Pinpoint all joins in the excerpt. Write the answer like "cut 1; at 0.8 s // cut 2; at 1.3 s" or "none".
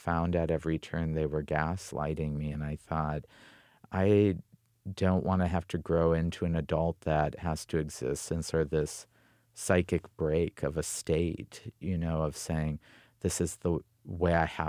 none